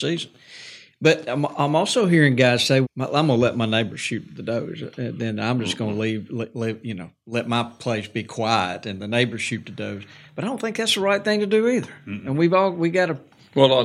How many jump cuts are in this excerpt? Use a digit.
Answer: 1